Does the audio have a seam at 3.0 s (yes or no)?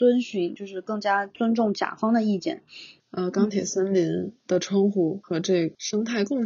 yes